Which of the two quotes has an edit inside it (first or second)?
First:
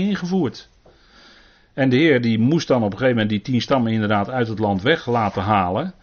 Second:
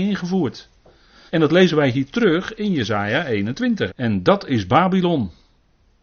second